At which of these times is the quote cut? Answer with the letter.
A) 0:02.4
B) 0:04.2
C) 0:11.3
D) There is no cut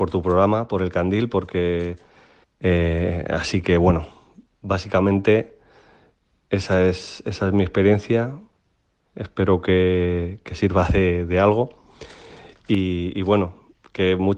A